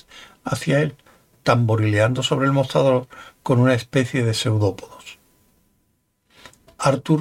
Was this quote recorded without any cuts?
yes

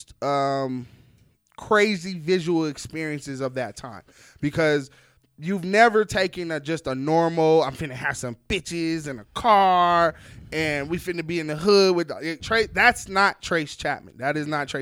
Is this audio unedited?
no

